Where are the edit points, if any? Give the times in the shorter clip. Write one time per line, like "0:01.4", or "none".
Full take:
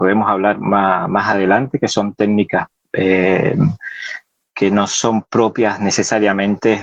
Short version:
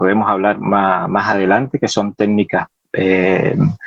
none